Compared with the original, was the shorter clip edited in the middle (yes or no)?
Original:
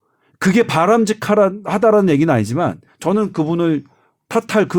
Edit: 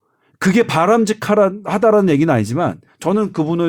no